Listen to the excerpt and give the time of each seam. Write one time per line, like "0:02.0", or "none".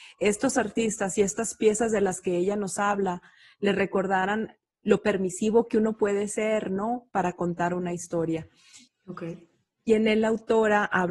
0:08.9